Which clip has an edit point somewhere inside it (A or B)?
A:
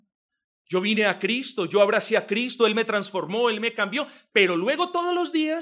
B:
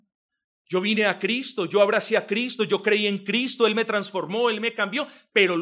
A